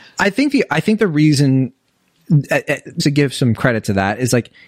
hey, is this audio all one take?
no; 1 cut; at 3.0 s

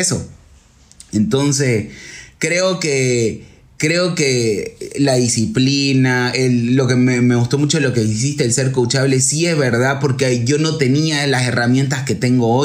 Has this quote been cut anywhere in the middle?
no; 0 cuts

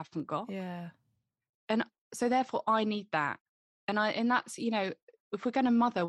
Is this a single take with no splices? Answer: yes; 0 cuts

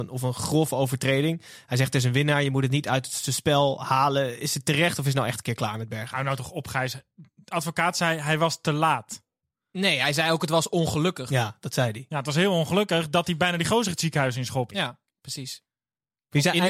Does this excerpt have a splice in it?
yes; 1 cut; at 14.7 s

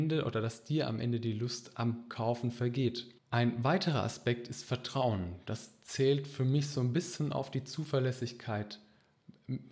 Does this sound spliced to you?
yes; 1 cut; at 3.2 s

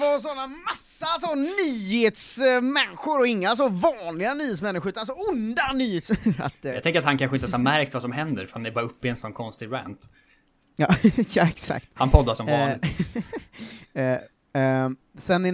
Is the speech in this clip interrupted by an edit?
yes; 1 cut; at 14.5 s

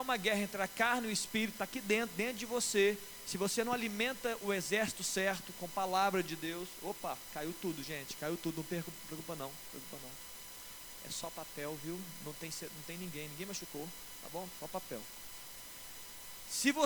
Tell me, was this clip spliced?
no; 0 cuts

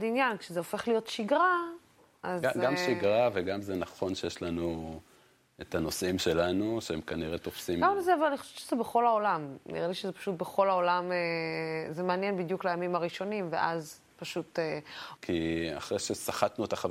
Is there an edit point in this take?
yes; 1 cut; at 15.2 s

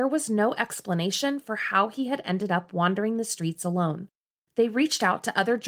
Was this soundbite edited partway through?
yes; 1 cut; at 4.5 s

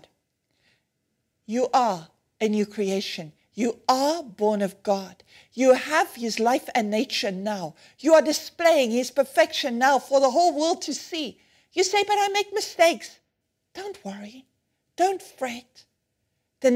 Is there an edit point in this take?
no; 0 cuts

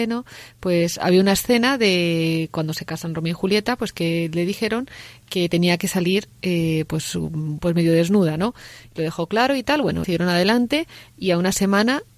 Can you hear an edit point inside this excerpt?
yes; 2 cuts; at 8.8 s, 10.0 s

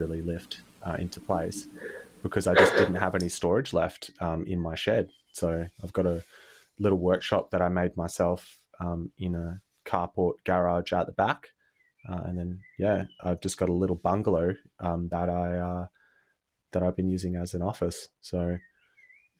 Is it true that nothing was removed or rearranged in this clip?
yes; 0 cuts

